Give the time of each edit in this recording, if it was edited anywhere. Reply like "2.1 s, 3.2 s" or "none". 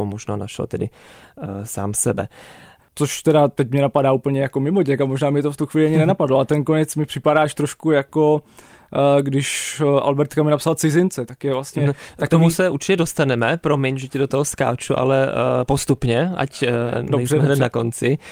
2.8 s